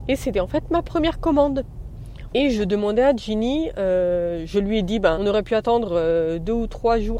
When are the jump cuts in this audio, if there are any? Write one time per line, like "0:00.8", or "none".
0:02.3
0:05.1